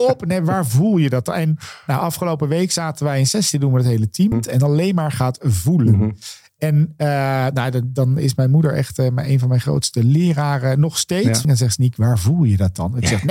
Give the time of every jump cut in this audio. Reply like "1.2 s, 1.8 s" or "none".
4.3 s, 11.4 s